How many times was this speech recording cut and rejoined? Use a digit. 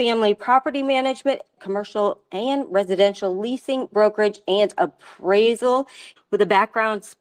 2